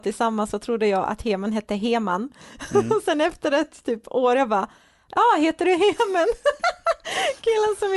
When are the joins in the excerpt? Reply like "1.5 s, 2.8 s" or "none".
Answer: none